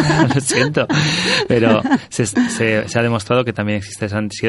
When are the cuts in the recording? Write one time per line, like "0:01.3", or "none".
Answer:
none